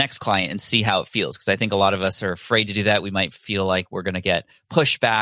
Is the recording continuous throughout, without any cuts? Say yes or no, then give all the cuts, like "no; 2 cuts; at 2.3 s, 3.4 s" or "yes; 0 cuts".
yes; 0 cuts